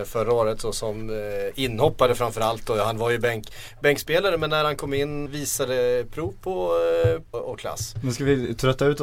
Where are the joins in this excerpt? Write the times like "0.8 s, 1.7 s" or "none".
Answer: 5.3 s, 7.3 s